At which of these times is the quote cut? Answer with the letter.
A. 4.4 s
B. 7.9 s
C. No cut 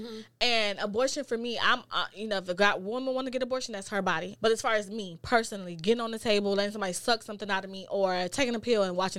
A